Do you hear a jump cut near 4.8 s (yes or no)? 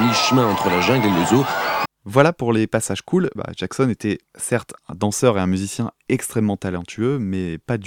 yes